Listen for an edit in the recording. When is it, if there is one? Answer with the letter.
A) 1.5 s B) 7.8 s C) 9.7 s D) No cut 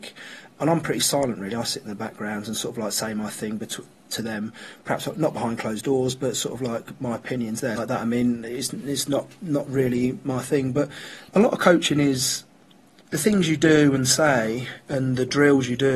B